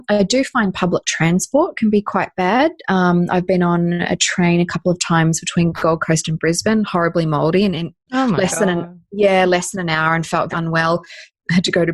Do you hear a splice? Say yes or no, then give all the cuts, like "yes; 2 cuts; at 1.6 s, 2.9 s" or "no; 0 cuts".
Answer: yes; 2 cuts; at 8.1 s, 10.5 s